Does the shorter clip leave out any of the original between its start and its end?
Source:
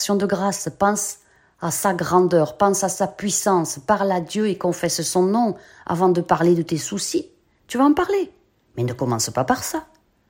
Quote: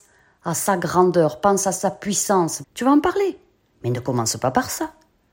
yes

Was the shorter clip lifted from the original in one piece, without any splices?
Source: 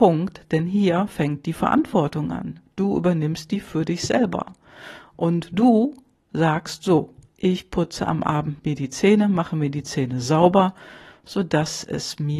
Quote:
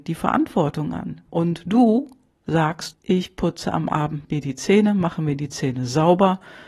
no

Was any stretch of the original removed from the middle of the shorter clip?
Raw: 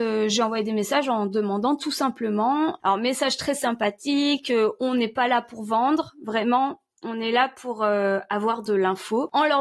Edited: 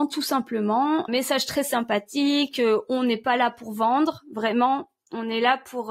yes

